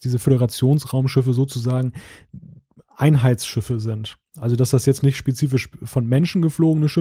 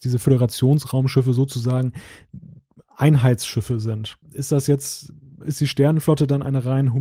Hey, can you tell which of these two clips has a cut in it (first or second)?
second